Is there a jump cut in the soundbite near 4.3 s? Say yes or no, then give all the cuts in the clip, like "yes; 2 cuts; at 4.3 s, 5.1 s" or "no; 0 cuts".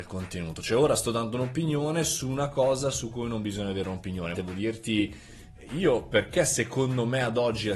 yes; 1 cut; at 4.3 s